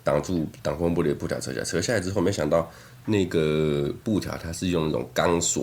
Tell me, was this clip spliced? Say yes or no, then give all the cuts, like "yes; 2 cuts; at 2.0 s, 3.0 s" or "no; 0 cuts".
no; 0 cuts